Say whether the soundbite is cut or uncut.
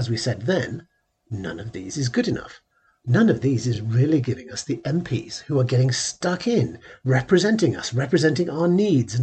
uncut